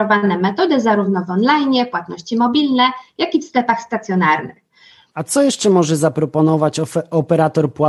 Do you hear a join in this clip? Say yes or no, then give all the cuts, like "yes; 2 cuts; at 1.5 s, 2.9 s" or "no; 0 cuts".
yes; 1 cut; at 5.1 s